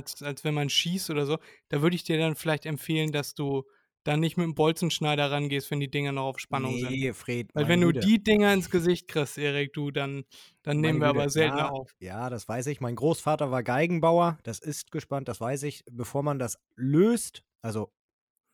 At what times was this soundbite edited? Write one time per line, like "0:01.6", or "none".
0:14.4